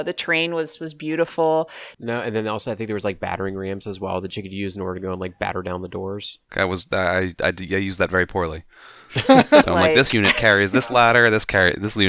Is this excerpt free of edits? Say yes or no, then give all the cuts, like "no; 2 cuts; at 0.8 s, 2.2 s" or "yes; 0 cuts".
no; 3 cuts; at 1.9 s, 6.5 s, 9.6 s